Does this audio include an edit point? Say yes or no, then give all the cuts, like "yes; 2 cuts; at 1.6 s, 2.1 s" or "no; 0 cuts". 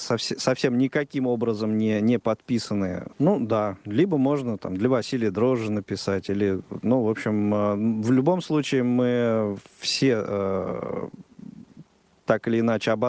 yes; 1 cut; at 3.1 s